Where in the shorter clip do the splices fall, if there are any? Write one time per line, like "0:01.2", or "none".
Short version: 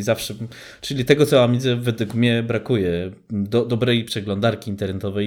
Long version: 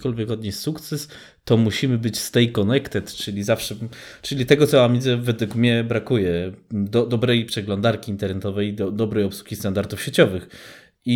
none